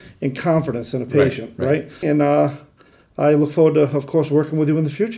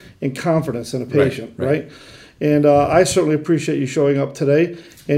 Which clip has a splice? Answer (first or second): first